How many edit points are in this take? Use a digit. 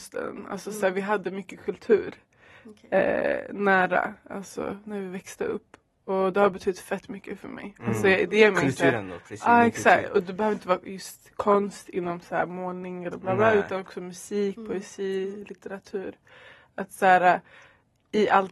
0